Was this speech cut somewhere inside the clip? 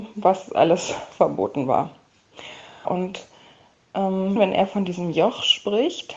yes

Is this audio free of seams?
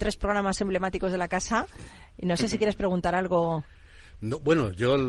yes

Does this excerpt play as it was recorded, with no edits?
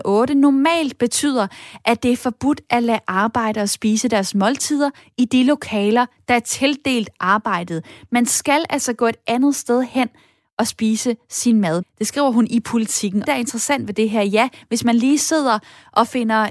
no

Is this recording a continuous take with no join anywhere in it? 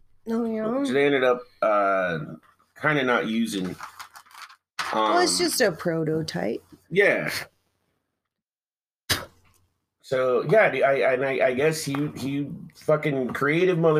yes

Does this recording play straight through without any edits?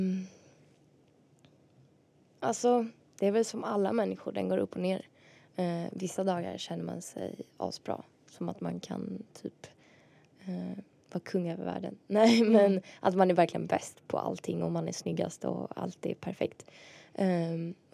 yes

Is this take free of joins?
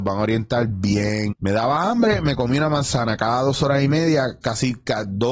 no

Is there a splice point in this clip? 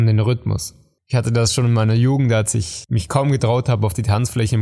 yes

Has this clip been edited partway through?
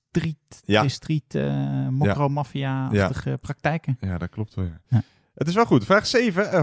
no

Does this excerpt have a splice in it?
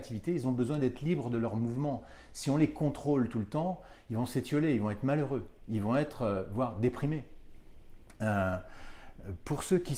no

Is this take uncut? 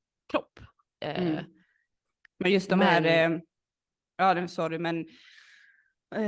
yes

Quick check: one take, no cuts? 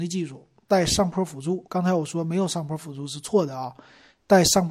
yes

